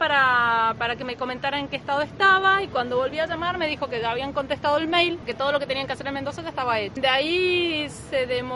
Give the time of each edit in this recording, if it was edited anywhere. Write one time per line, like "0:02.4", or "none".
0:05.3